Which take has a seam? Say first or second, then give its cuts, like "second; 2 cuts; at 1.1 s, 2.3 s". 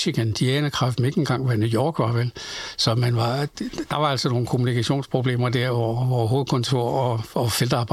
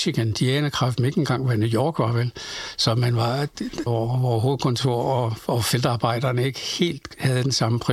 second; 1 cut; at 3.9 s